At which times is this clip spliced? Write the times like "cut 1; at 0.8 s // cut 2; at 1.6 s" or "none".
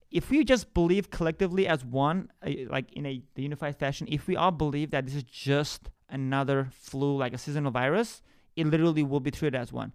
none

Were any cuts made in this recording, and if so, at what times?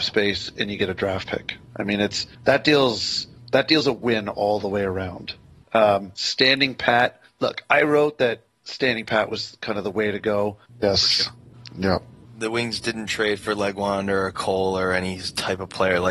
cut 1; at 7.2 s // cut 2; at 10.7 s

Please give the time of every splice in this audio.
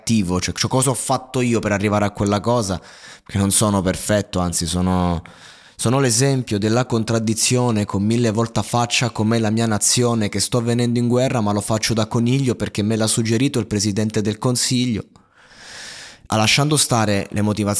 cut 1; at 16.3 s

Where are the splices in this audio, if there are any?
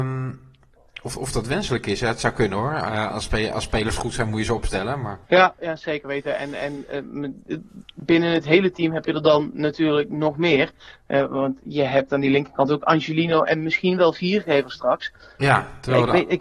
cut 1; at 5.2 s // cut 2; at 15.4 s

